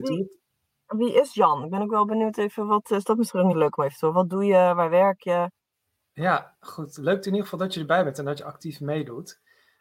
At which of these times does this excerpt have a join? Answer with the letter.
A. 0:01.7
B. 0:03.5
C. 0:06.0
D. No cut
B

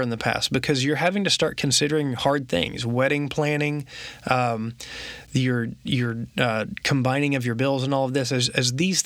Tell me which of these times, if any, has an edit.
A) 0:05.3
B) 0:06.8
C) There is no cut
C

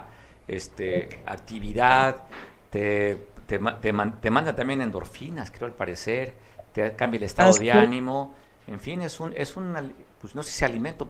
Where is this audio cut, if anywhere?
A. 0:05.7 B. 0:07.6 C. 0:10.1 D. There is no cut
D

